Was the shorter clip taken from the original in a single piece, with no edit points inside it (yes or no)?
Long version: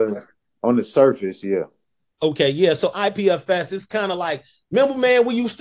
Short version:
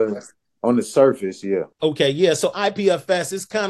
no